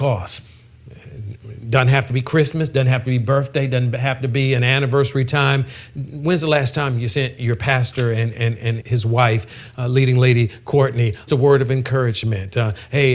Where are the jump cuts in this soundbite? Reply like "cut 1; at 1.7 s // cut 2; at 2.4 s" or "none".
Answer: cut 1; at 8.8 s // cut 2; at 11.3 s